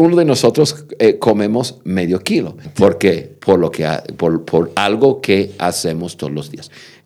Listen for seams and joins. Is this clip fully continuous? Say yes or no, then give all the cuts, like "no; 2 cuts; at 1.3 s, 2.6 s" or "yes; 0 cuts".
no; 1 cut; at 2.6 s